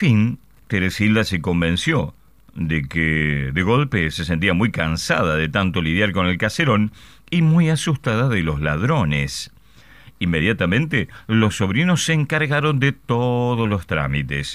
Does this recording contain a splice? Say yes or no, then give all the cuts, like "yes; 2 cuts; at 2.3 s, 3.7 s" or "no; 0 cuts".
no; 0 cuts